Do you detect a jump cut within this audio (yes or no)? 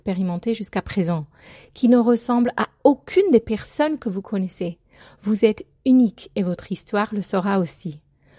no